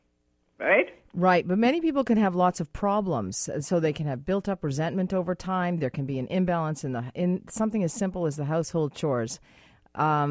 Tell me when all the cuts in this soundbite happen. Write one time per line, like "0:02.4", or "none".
none